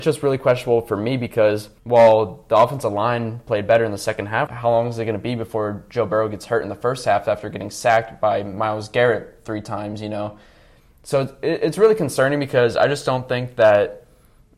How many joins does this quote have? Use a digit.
2